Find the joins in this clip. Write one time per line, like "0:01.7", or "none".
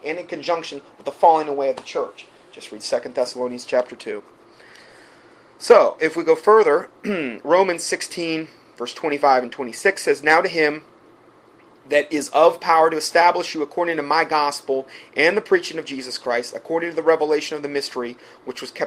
none